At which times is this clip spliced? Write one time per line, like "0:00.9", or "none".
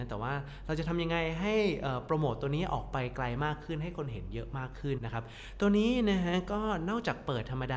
0:05.0